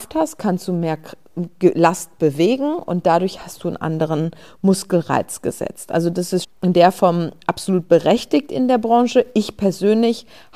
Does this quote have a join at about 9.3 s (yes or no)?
no